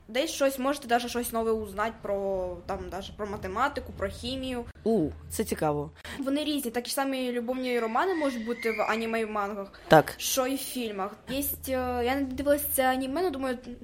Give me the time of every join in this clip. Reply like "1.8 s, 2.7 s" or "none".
6.1 s, 11.3 s